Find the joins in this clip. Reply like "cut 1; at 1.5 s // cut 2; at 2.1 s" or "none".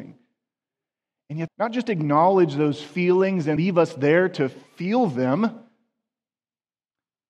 cut 1; at 1.5 s // cut 2; at 3.6 s